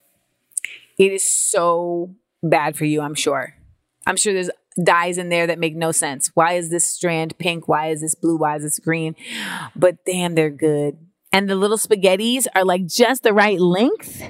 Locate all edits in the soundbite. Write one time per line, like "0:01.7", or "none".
none